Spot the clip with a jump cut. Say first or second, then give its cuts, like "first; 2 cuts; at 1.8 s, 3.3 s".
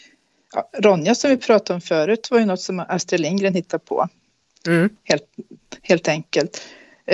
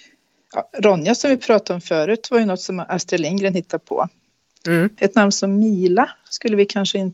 second; 1 cut; at 5.0 s